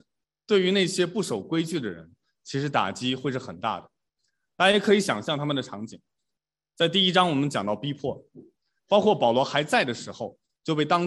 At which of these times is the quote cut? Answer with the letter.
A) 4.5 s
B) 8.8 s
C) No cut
B